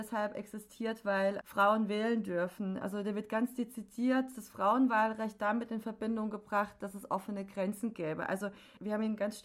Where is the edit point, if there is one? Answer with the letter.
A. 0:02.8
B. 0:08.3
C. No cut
C